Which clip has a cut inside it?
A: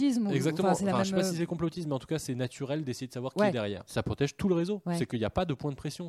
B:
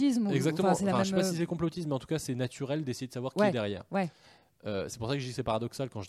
A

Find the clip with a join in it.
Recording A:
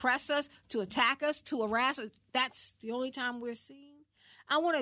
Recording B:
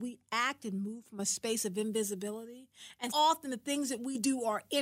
B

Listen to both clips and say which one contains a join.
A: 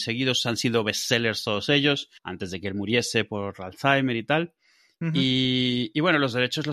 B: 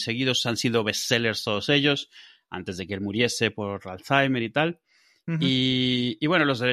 A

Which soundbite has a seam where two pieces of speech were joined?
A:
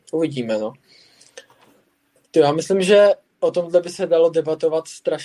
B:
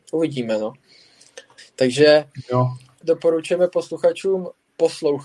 B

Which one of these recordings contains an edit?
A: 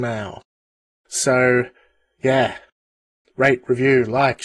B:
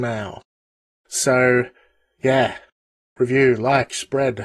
B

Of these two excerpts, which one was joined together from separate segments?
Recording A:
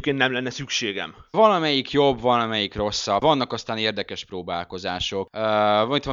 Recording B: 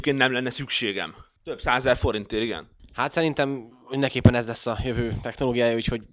A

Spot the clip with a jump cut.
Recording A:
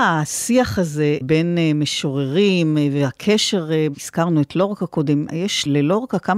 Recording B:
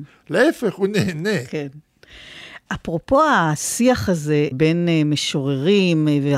A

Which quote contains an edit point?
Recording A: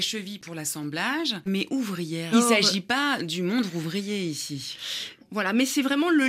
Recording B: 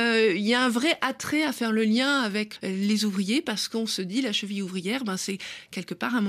A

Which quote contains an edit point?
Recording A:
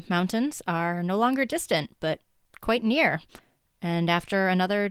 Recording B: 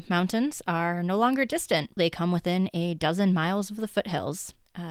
B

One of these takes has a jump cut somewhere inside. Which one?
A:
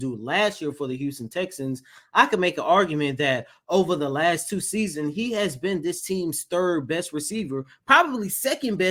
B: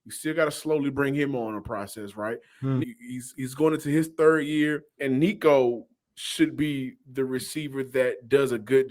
B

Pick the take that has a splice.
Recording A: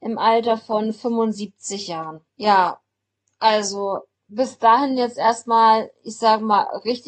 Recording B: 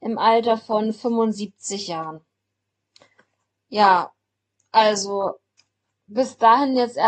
A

